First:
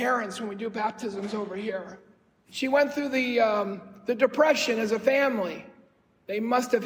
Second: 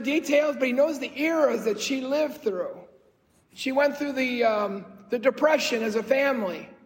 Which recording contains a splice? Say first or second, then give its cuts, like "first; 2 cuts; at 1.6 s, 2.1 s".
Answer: first; 1 cut; at 2.4 s